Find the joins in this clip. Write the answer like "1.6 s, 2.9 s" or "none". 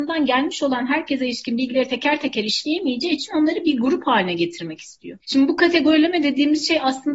none